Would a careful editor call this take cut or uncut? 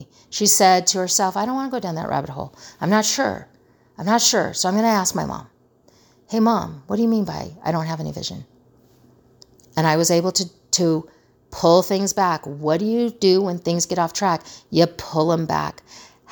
uncut